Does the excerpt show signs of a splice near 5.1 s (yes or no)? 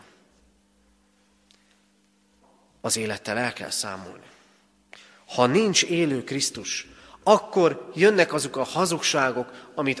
no